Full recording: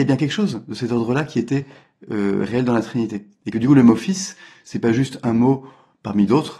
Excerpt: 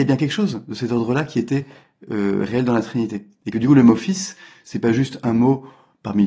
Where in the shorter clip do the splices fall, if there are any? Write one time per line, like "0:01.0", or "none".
none